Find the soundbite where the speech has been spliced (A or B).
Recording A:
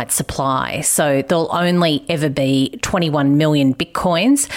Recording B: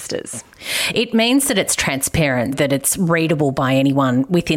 B